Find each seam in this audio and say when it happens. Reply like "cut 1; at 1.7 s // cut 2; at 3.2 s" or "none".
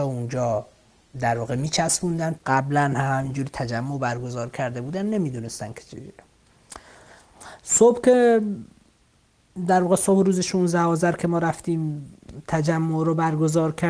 cut 1; at 2.4 s